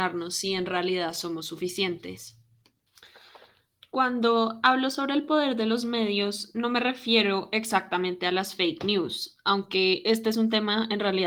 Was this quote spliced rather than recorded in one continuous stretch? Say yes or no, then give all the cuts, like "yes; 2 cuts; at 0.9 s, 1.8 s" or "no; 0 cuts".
no; 0 cuts